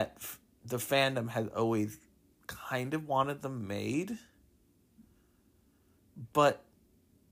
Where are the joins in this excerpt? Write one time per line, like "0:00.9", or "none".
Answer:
none